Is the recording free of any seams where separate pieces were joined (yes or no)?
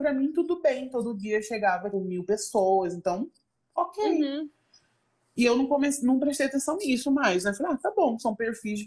no